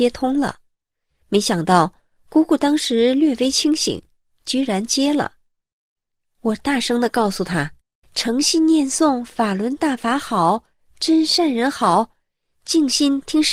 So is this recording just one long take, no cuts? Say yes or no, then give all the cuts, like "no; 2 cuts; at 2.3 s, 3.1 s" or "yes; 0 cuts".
yes; 0 cuts